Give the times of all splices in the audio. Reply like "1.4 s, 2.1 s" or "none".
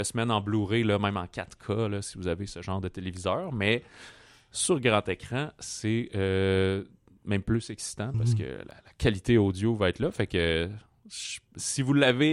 8.1 s